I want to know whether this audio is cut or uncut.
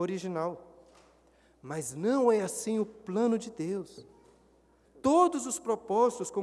cut